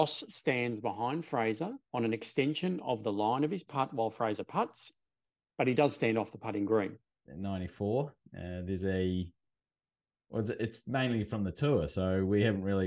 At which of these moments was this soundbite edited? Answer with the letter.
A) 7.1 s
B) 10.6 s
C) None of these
A